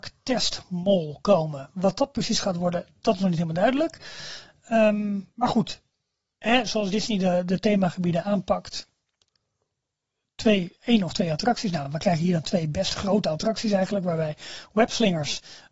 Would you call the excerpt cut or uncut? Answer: uncut